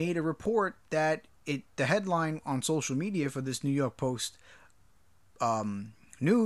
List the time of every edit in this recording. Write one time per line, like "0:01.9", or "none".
none